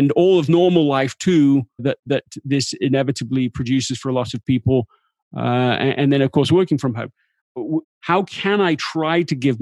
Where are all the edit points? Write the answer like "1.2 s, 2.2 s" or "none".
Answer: 1.8 s, 7.8 s